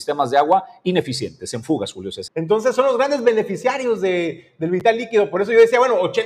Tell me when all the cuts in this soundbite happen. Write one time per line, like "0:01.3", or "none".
0:02.3